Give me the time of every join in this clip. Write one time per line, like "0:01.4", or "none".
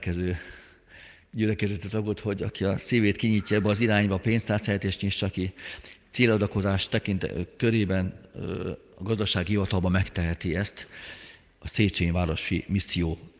none